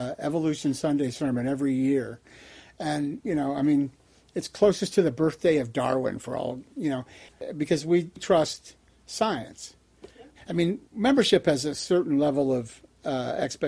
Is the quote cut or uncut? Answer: cut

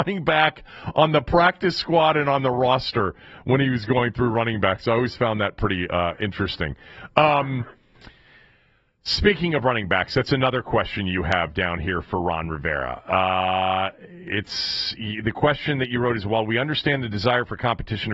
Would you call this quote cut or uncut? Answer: uncut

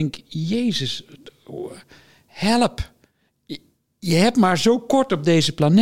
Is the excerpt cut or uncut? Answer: uncut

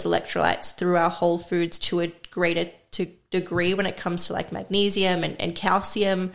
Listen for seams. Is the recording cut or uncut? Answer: uncut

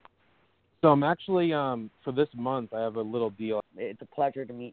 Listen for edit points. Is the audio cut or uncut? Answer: cut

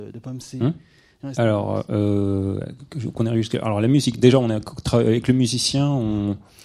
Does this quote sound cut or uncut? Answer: cut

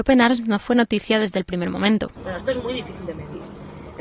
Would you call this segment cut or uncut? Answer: cut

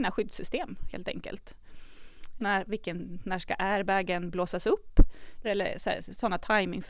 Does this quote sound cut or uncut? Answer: cut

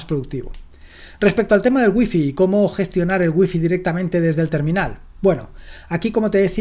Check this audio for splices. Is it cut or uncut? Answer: uncut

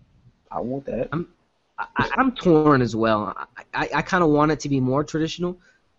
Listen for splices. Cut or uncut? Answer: cut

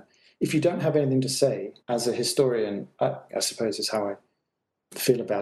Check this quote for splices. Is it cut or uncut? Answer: cut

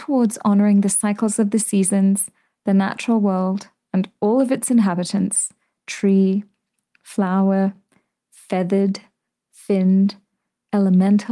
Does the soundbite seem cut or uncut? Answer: uncut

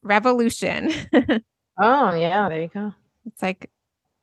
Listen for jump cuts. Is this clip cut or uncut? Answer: cut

